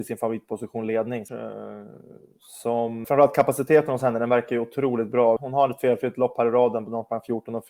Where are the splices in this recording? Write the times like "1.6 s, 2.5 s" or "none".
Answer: 1.3 s, 3.0 s, 5.4 s